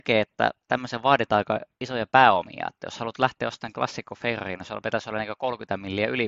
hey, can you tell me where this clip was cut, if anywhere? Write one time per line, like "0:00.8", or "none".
none